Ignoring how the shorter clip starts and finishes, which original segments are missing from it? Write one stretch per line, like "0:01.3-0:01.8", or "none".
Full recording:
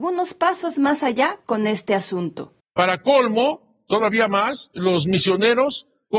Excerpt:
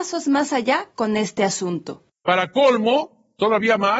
none